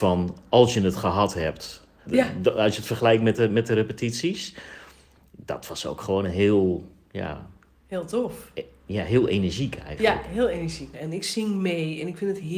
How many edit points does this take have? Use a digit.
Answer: 2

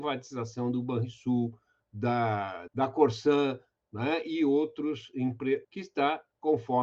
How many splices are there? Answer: 2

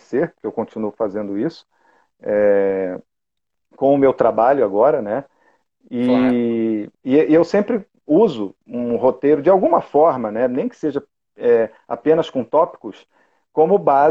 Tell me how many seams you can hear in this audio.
1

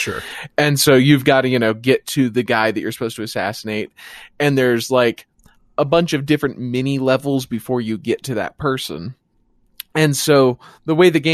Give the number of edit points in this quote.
0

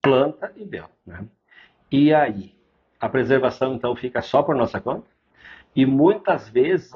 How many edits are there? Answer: 0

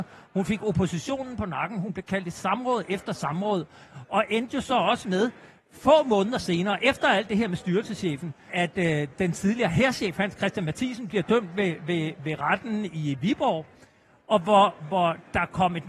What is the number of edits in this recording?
1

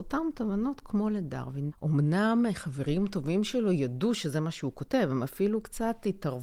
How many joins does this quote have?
1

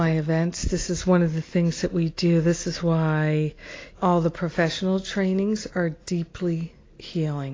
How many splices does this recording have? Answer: 1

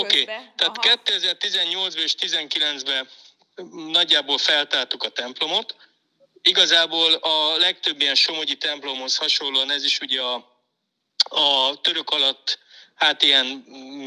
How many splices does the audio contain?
0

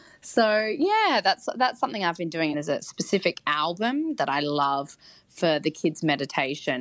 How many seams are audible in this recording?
1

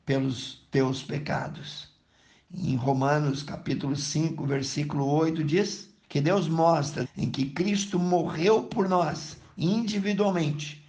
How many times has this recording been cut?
2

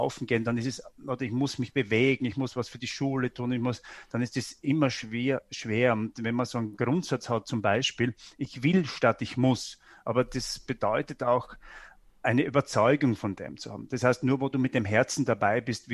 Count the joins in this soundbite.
0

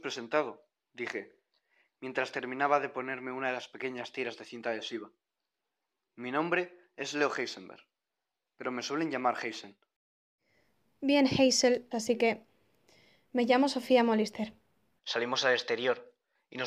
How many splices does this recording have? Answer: 2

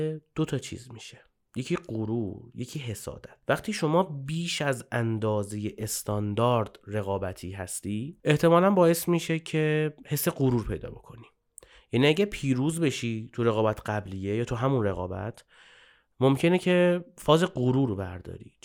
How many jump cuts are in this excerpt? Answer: 0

